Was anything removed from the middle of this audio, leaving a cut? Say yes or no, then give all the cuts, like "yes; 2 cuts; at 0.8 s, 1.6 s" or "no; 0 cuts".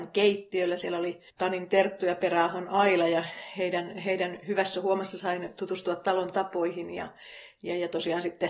yes; 1 cut; at 1.3 s